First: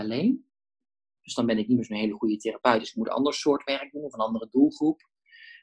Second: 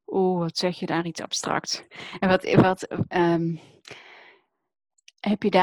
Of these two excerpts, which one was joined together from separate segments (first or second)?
first